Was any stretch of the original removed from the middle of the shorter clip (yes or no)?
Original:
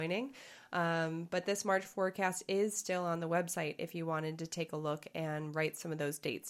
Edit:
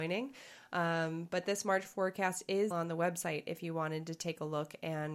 yes